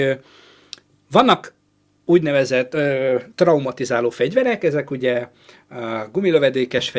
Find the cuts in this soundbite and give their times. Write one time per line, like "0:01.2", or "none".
none